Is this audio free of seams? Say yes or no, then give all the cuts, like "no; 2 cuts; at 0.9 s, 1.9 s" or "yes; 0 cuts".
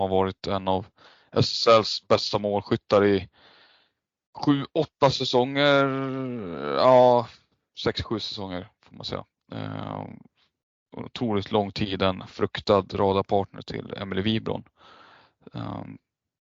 yes; 0 cuts